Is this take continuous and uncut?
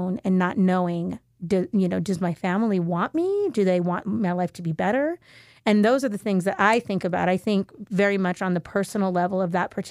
yes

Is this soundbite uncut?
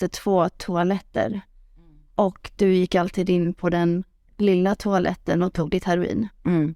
yes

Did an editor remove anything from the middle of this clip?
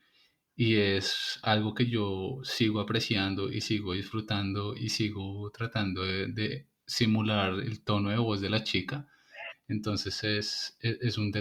yes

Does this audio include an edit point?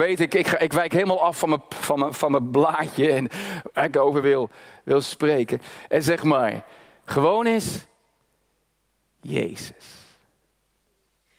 no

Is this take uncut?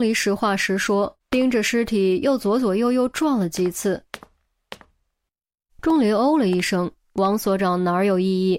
no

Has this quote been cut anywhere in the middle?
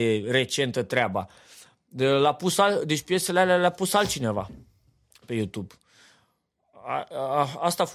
no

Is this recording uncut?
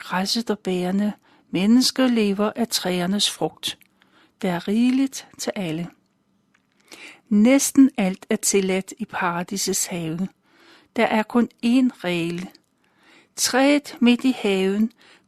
yes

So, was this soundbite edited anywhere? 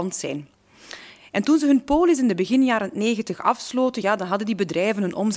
no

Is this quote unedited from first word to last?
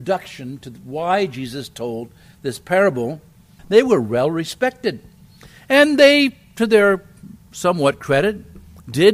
no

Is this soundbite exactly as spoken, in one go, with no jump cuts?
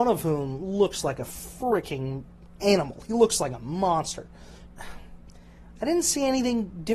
no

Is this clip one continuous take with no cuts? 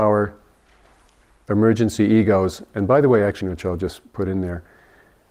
no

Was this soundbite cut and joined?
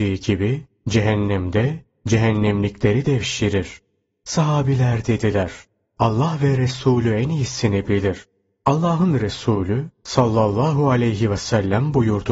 yes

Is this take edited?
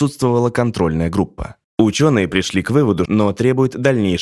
yes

